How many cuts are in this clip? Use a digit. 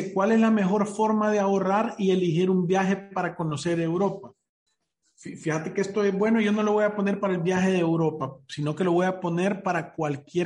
0